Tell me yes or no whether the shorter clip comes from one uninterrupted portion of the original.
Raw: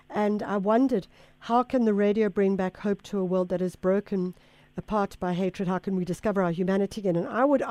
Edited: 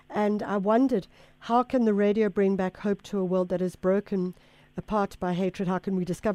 yes